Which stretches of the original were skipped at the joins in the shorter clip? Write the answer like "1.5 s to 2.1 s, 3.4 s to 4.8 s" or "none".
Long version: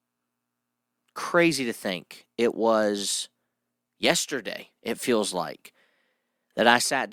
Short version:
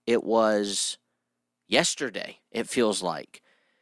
none

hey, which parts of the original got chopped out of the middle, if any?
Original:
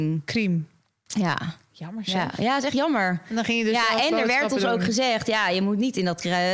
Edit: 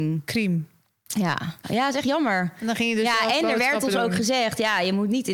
1.6 s to 2.3 s

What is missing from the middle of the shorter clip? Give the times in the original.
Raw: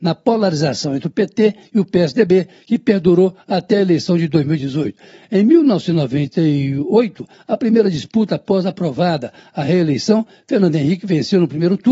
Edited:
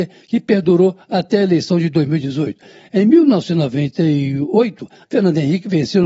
7.4 s to 10.4 s

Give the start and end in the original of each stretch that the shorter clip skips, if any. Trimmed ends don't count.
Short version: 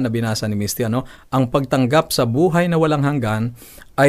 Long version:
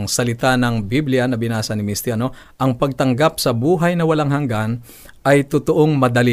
none

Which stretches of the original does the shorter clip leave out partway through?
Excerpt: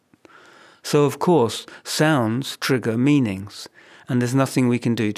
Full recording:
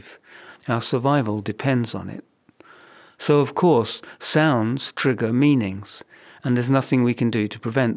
none

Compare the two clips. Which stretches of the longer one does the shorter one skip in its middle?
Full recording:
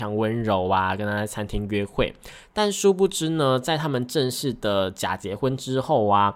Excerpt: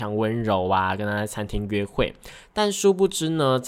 none

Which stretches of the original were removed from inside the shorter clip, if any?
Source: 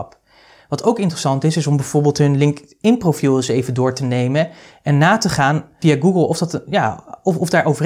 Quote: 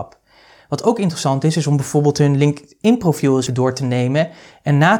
3.5 s to 3.7 s

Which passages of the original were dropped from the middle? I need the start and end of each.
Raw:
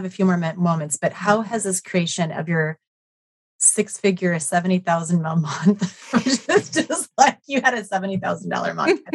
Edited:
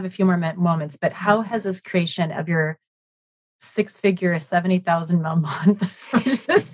none

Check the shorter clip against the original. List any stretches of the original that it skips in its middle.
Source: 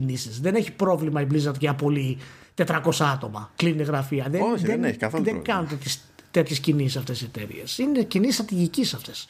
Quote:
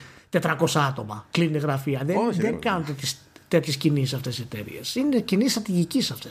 4.8 s to 5.4 s

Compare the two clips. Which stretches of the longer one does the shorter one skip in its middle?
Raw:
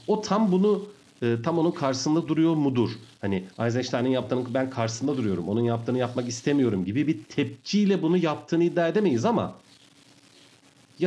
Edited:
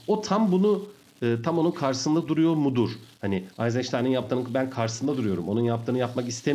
none

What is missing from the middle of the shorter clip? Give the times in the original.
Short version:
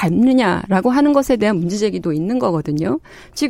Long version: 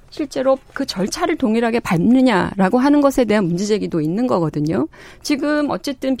none

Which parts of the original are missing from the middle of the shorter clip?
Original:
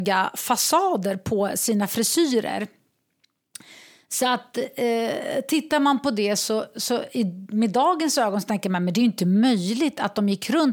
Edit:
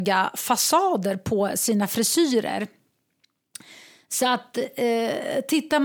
none

